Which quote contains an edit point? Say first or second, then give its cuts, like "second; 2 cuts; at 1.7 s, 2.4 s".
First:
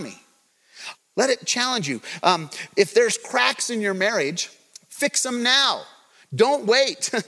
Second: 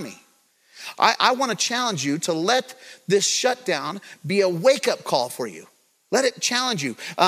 first; 1 cut; at 0.9 s